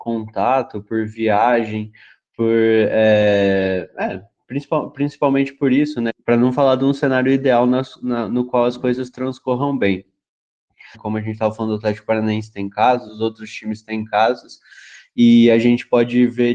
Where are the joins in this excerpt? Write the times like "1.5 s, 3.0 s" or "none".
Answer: 6.1 s, 10.9 s, 13.1 s

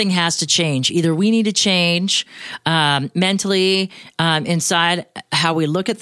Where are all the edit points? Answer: none

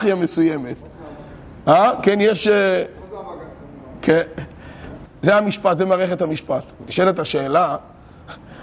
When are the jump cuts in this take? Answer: 5.1 s

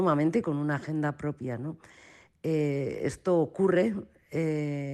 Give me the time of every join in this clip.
none

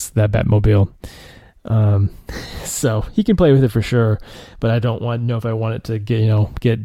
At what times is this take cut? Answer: none

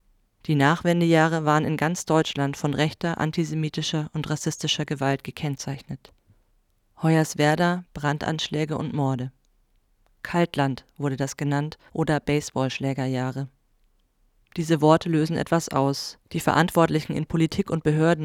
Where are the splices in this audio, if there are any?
7.8 s, 16.2 s

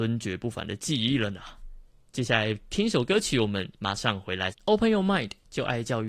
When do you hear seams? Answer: 4.5 s

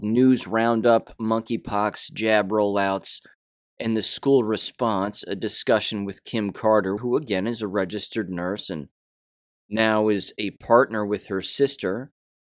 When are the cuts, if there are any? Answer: 7.0 s

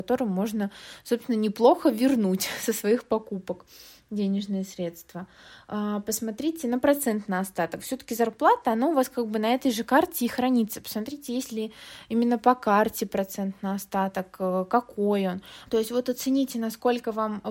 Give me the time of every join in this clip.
15.7 s

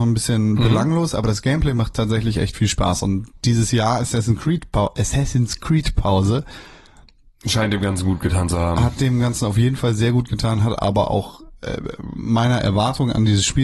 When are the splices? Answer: none

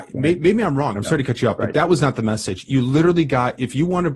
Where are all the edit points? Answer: 0.9 s

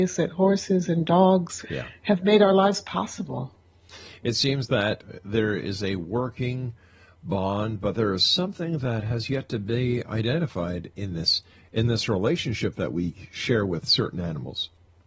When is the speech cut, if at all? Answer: 1.6 s

